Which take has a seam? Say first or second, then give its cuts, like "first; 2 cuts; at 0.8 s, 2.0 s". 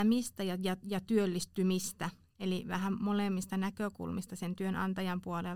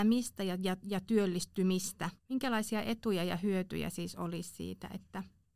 second; 1 cut; at 2.2 s